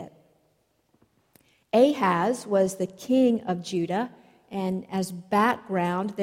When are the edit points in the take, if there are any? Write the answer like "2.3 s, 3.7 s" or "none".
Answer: none